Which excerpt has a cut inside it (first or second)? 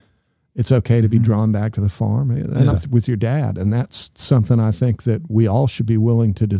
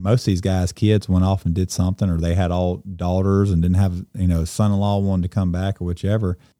first